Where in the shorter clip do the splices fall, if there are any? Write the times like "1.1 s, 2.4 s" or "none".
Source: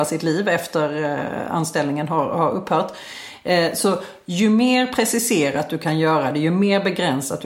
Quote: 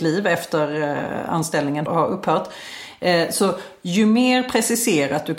1.9 s